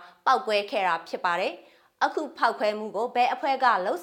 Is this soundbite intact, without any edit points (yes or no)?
yes